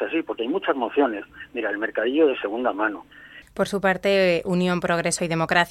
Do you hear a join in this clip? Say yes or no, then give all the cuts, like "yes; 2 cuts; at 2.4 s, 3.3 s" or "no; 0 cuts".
yes; 1 cut; at 3.4 s